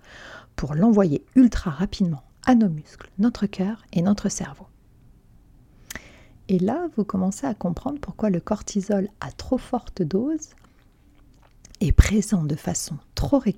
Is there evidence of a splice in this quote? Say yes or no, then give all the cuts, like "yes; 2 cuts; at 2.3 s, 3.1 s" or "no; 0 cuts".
no; 0 cuts